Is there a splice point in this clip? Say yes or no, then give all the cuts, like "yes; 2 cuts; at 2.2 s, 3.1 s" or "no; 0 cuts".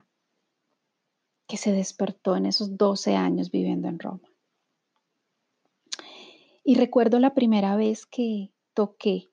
no; 0 cuts